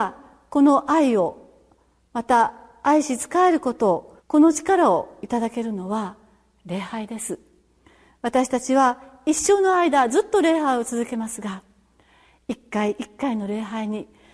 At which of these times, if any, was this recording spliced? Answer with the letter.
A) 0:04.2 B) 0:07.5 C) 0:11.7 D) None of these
A